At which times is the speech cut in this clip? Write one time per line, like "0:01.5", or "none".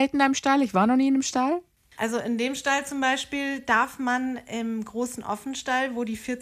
0:01.9